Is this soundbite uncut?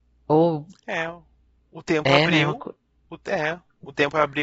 yes; 0 cuts

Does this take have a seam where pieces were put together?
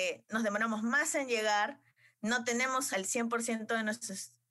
yes; 1 cut; at 2.9 s

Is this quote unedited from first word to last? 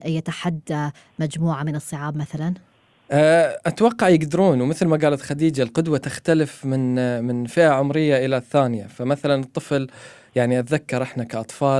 yes; 0 cuts

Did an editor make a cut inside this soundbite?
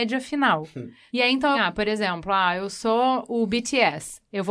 yes; 1 cut; at 1.5 s

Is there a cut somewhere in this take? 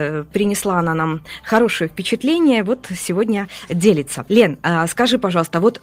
no; 0 cuts

